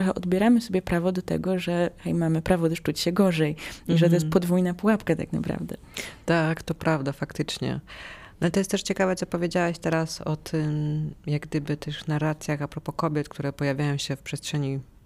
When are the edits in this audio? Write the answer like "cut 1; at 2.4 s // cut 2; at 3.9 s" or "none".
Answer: none